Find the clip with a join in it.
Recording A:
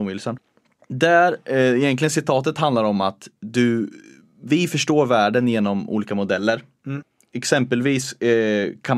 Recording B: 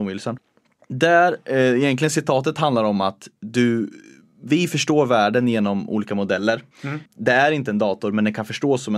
B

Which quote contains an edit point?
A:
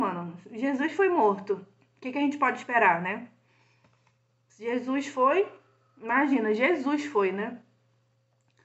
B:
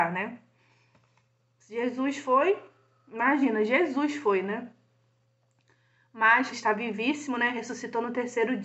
B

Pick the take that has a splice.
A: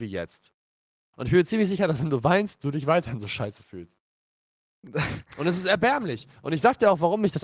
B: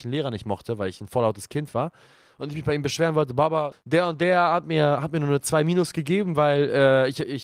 B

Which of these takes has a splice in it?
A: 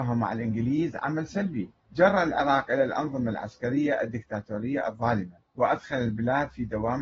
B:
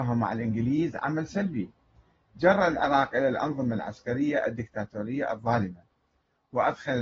A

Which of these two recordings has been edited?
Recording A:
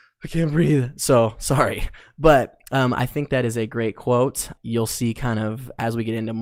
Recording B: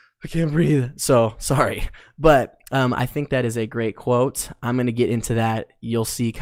A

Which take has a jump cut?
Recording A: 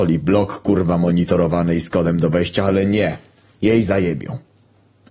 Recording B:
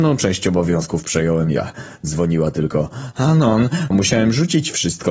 B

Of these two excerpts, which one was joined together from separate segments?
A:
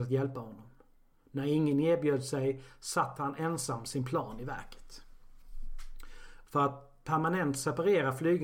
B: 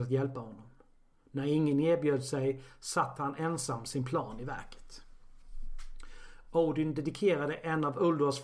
A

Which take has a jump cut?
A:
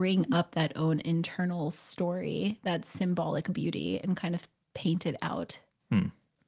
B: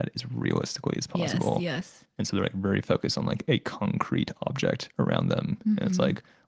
B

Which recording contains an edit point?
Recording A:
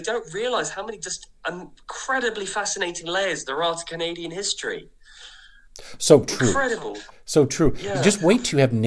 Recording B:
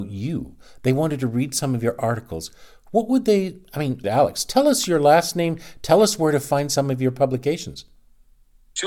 B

